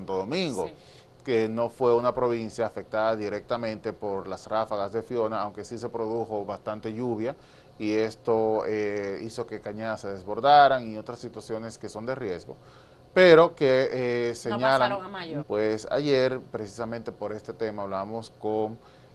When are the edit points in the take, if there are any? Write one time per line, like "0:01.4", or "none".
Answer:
0:15.4